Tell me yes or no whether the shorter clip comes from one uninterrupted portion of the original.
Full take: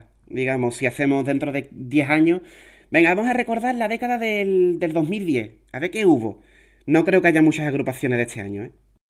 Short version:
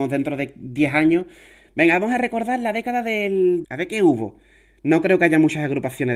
no